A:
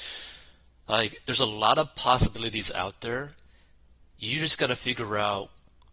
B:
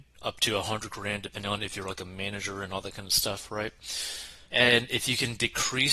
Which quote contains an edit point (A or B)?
B